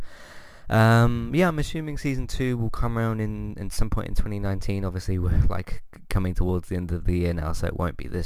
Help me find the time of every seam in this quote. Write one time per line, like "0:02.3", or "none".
none